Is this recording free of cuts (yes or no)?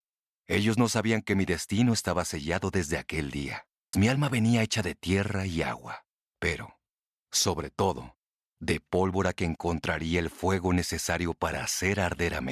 no